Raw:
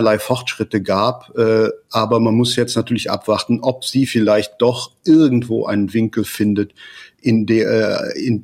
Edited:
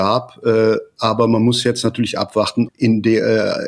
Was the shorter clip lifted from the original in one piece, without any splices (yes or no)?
no